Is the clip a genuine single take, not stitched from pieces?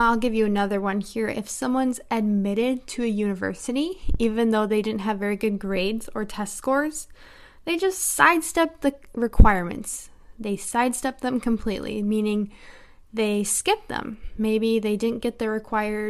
yes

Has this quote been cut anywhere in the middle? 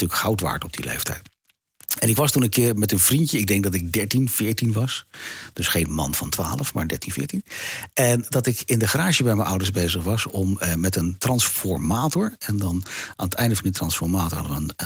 no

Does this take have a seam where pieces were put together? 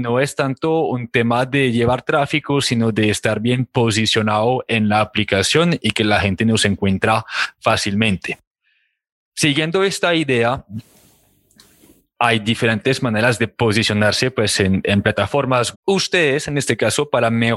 yes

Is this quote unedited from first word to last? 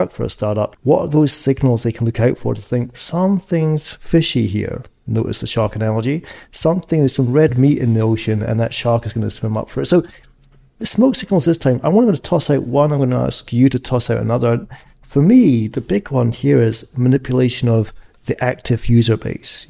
yes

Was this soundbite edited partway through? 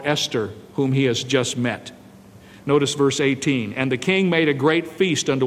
yes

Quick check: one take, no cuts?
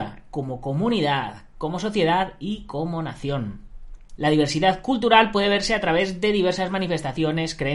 no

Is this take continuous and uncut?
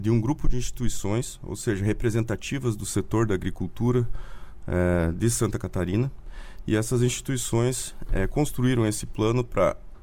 yes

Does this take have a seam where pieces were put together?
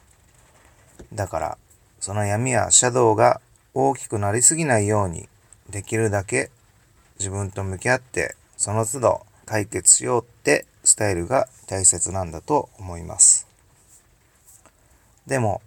yes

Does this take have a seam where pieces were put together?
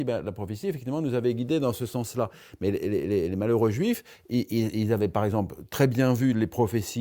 no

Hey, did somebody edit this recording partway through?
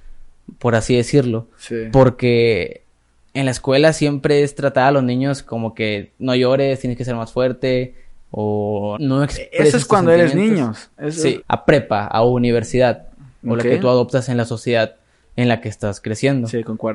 yes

